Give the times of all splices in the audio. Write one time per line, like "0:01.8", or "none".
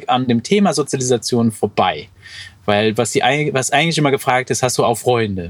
none